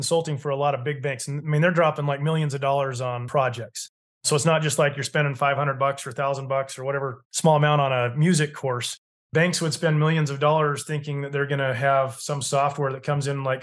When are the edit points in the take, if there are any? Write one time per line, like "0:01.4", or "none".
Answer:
none